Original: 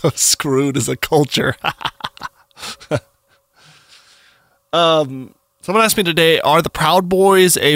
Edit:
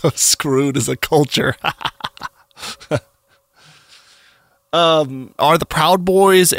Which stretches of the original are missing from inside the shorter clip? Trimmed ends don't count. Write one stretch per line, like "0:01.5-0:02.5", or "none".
0:05.4-0:06.4